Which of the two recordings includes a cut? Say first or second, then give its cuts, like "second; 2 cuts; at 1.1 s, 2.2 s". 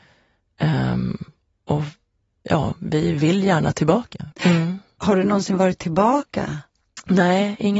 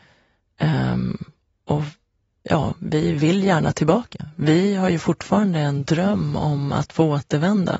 first; 1 cut; at 4.3 s